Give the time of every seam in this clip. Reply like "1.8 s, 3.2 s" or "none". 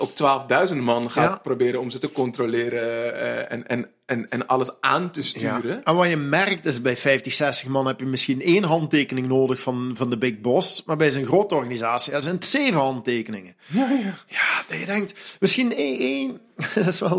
none